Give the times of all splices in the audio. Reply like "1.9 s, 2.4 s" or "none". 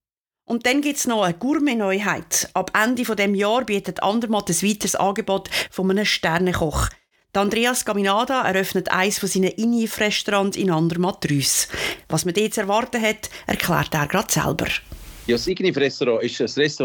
none